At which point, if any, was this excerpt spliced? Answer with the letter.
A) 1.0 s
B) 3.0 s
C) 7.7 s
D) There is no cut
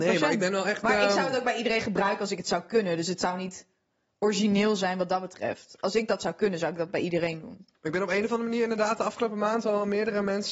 C